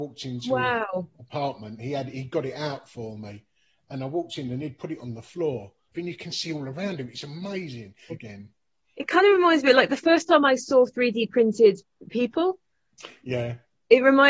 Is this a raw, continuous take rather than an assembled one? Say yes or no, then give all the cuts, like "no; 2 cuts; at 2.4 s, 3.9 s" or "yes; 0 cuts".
no; 2 cuts; at 5.9 s, 8.1 s